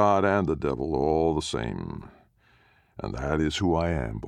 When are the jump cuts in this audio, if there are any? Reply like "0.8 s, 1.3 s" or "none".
none